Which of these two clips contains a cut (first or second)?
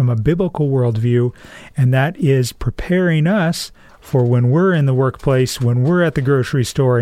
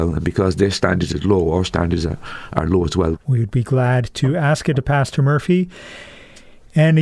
second